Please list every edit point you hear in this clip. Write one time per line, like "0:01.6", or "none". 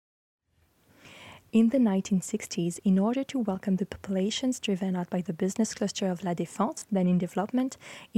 none